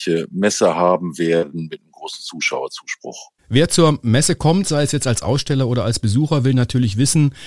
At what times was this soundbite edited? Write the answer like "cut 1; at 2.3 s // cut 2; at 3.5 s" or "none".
cut 1; at 3.4 s